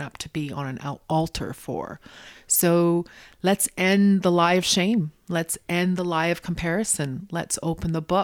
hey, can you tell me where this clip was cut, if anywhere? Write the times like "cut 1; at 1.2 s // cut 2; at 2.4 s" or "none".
none